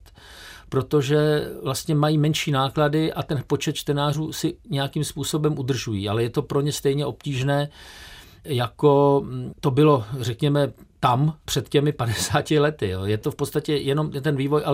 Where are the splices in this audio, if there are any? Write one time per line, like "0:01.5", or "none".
none